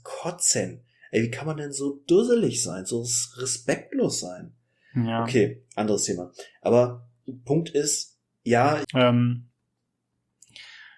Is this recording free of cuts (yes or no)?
no